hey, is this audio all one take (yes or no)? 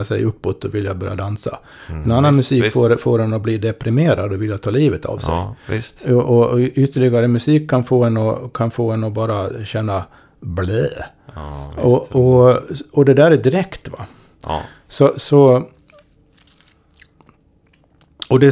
yes